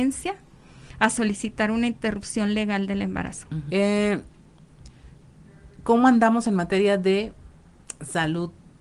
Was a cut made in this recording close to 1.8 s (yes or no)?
no